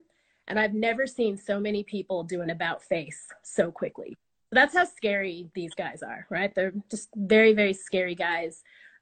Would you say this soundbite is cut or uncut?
uncut